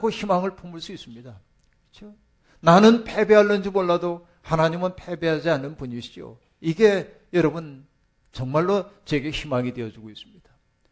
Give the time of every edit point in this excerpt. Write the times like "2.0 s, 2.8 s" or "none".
none

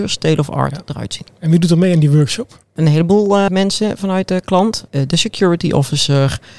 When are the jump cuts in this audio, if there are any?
3.5 s, 4.9 s

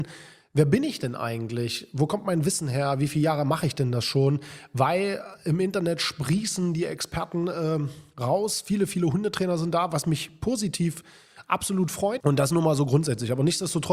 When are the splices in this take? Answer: 12.2 s

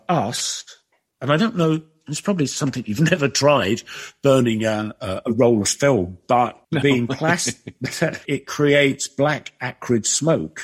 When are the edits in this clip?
6.6 s, 8.3 s

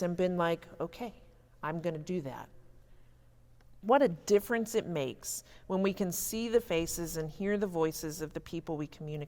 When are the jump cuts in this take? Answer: 3.8 s

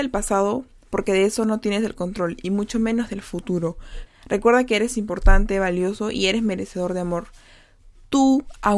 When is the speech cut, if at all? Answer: 4.1 s

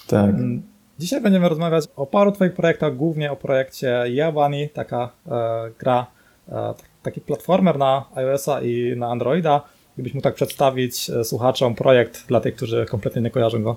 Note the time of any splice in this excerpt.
1.8 s

